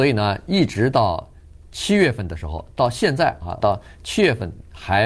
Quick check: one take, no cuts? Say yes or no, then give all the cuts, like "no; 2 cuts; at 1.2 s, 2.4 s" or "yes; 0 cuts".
no; 1 cut; at 3.6 s